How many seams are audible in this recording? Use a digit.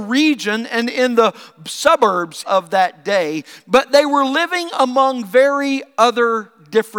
1